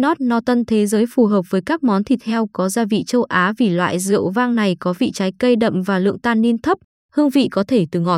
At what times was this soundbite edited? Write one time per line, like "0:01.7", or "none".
0:07.0

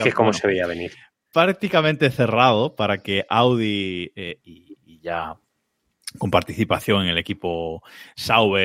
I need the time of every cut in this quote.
0:04.4

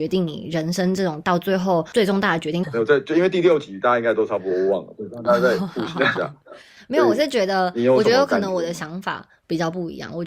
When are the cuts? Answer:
0:02.6

